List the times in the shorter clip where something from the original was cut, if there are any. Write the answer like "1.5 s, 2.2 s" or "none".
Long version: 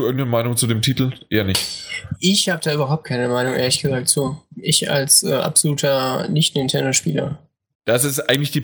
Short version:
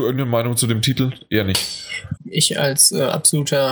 2.2 s